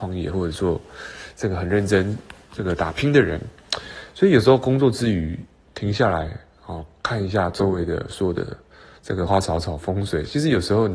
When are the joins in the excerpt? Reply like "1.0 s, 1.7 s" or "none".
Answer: 9.3 s